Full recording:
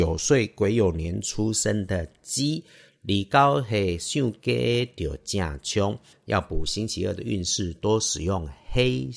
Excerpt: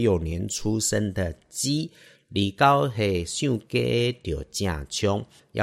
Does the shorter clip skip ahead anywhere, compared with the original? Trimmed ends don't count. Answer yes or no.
no